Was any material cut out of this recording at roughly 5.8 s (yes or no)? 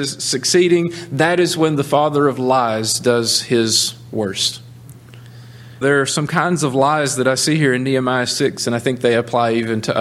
yes